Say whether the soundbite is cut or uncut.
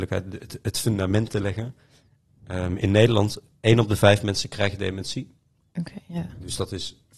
uncut